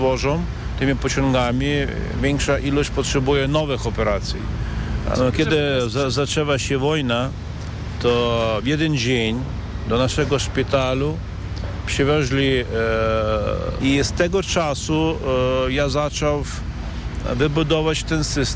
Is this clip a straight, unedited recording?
no; 2 cuts; at 5.1 s, 13.8 s

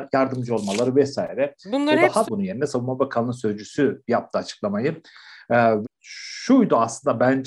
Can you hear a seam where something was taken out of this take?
yes; 2 cuts; at 2.2 s, 5.8 s

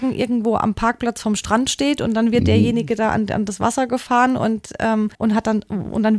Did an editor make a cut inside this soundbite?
yes; 1 cut; at 5.1 s

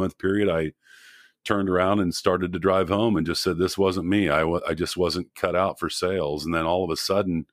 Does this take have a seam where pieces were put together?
no; 0 cuts

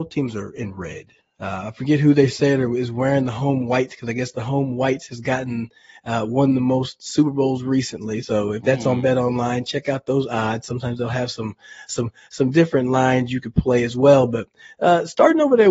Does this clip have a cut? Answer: no; 0 cuts

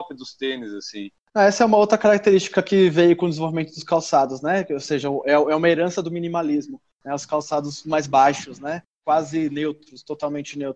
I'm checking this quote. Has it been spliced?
no; 0 cuts

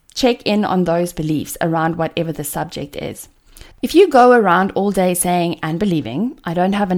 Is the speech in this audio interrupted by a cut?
yes; 1 cut; at 3.7 s

